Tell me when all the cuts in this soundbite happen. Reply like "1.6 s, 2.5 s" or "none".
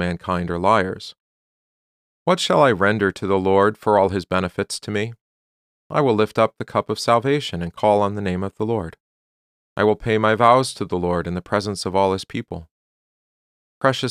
none